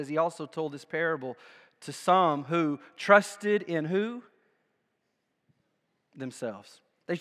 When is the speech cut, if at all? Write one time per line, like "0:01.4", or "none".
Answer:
none